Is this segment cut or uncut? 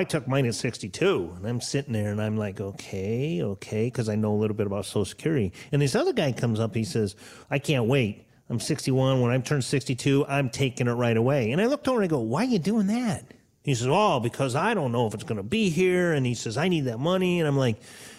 cut